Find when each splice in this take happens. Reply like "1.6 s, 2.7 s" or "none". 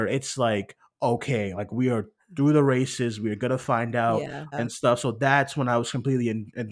4.5 s